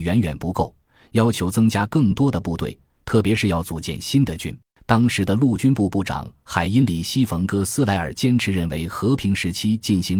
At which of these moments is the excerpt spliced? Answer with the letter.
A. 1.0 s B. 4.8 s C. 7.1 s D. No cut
B